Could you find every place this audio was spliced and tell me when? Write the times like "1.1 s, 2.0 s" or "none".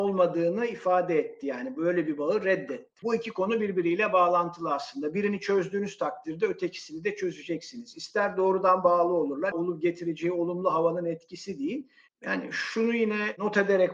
3.0 s, 9.5 s, 12.1 s